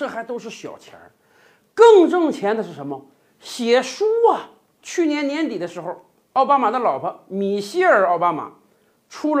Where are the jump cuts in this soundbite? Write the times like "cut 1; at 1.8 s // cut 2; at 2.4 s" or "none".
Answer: none

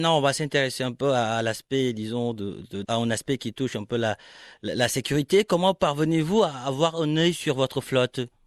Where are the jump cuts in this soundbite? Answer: cut 1; at 2.8 s

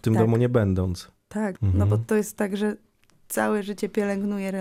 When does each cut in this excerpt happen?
cut 1; at 1.5 s

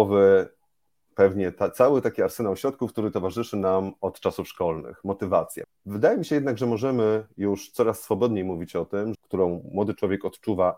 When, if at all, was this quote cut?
cut 1; at 5.6 s // cut 2; at 9.1 s

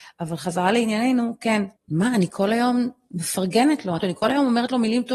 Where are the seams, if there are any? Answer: cut 1; at 1.8 s // cut 2; at 4.0 s

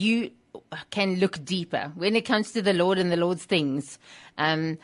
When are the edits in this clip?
none

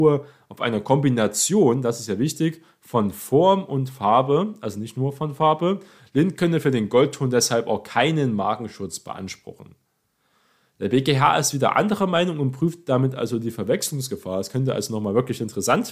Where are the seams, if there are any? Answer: none

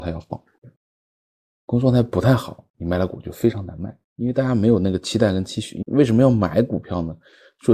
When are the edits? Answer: cut 1; at 5.8 s

